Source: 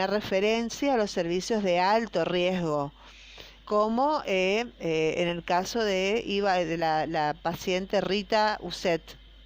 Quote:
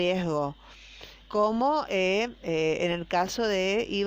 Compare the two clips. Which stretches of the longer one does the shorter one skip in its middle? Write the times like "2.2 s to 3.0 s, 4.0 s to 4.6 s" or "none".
none